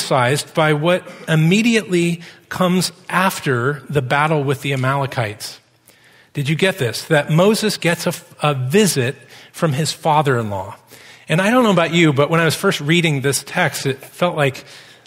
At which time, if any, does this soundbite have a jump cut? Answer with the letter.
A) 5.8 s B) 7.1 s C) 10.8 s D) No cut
D